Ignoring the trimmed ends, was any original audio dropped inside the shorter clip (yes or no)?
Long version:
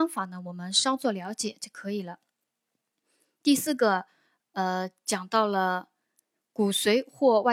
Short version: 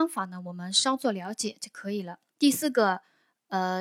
yes